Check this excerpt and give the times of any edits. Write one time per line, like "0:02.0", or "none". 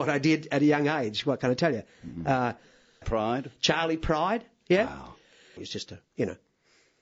0:03.0
0:05.6